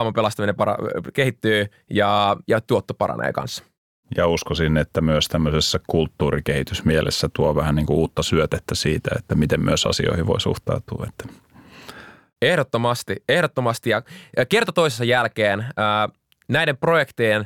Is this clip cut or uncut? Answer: uncut